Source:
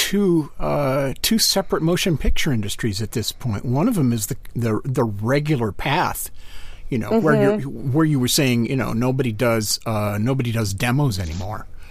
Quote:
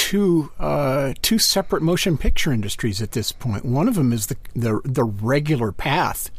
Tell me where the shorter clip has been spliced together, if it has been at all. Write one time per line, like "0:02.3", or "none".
none